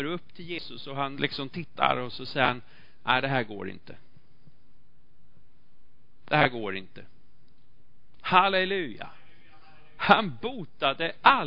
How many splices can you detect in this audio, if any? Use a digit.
2